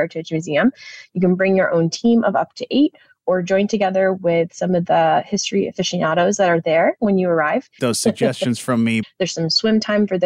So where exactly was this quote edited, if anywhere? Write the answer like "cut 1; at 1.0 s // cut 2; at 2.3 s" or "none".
cut 1; at 7.8 s // cut 2; at 9.0 s